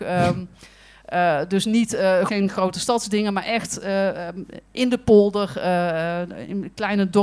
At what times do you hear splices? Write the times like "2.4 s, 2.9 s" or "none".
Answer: 2.3 s